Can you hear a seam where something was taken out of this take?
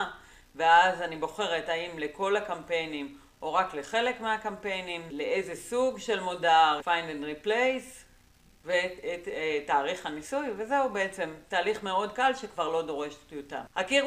yes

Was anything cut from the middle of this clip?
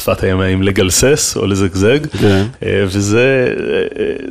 no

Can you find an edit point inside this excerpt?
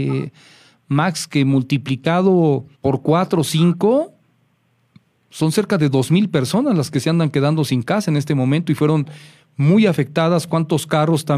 yes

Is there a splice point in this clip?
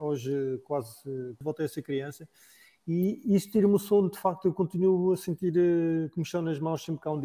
yes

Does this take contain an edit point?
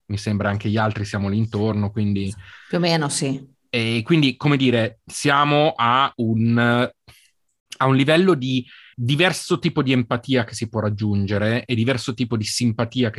yes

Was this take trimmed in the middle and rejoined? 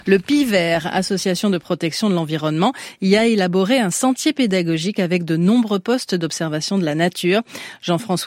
no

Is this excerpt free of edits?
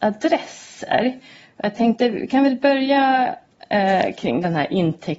yes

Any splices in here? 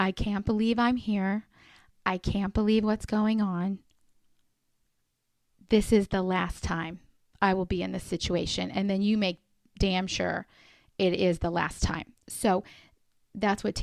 no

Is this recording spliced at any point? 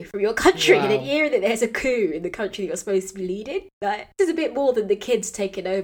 no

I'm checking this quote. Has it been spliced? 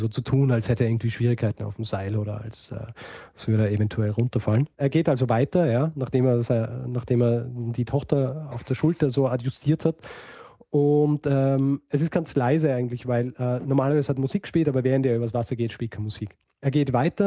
no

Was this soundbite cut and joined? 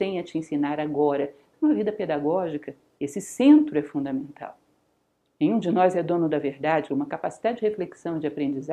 yes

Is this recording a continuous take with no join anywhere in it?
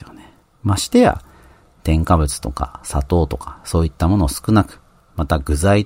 yes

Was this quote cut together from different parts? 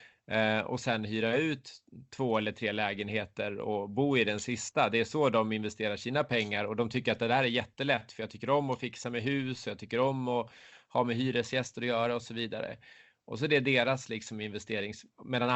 no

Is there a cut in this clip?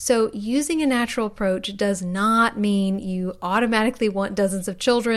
no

